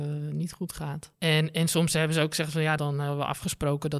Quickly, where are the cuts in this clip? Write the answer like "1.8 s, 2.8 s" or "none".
1.1 s, 2.8 s